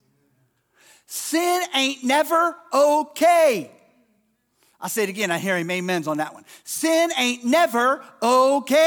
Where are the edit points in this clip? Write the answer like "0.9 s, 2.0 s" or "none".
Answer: none

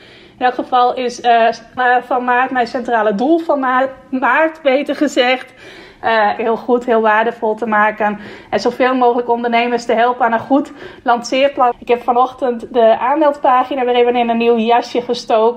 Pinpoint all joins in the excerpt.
1.8 s, 6.4 s, 11.7 s

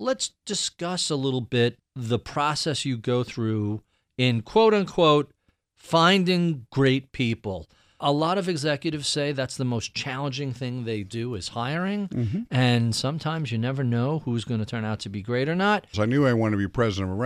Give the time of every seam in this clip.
15.9 s

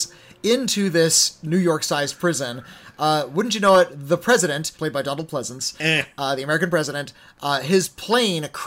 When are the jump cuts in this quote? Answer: 4.8 s

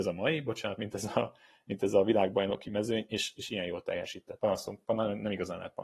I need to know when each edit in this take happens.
4.4 s

